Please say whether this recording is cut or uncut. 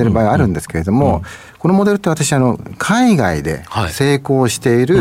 uncut